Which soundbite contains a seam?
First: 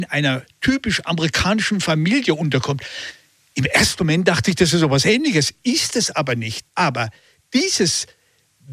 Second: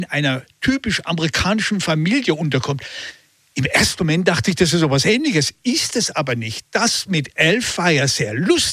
first; 1 cut; at 6.7 s

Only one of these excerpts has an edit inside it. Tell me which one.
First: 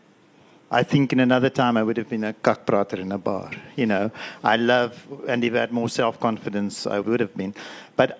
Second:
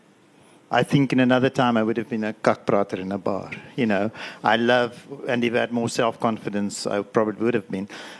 first; 1 cut; at 7.0 s

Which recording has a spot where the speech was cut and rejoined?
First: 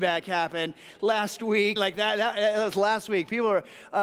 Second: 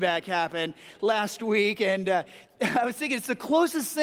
first; 1 cut; at 1.8 s

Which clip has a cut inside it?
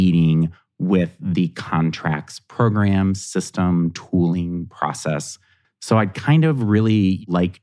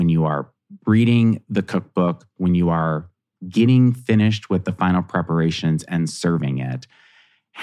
first; 1 cut; at 5.6 s

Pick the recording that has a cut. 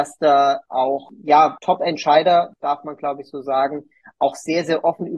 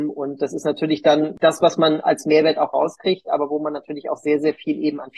first; 1 cut; at 1.6 s

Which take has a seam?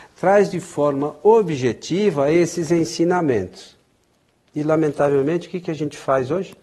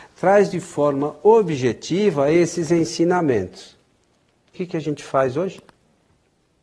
second; 1 cut; at 4.5 s

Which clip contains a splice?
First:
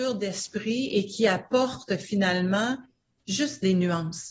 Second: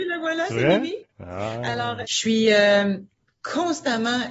second; 1 cut; at 2.0 s

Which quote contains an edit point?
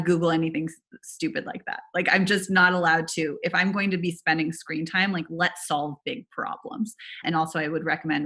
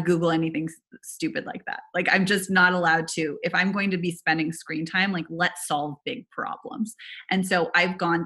first; 1 cut; at 7.2 s

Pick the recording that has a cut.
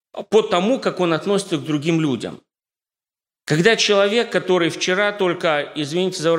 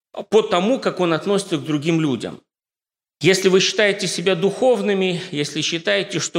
second; 1 cut; at 3.2 s

